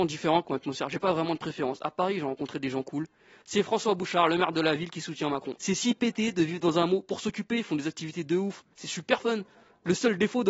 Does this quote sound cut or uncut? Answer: cut